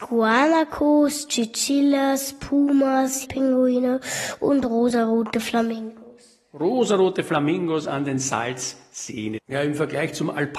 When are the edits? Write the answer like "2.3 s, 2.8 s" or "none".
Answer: 3.2 s, 9.4 s